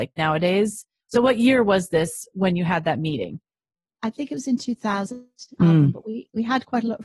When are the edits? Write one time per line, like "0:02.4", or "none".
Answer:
0:05.6